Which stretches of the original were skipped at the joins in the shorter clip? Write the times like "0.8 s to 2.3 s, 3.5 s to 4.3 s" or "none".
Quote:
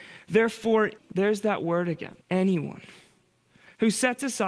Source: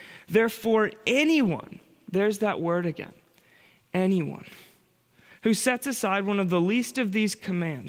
1.0 s to 1.9 s, 3.2 s to 3.8 s